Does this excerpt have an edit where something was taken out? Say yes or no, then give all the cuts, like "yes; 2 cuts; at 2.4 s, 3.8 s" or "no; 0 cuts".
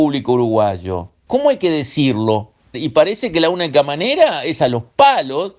yes; 2 cuts; at 1.3 s, 2.7 s